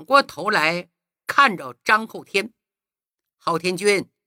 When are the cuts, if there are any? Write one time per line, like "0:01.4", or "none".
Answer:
none